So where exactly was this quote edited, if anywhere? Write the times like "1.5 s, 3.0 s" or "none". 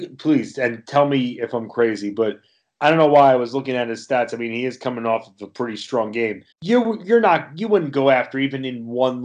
6.5 s